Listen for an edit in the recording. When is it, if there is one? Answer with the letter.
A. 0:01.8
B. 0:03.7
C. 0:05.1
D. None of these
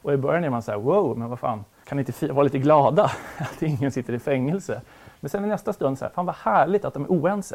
A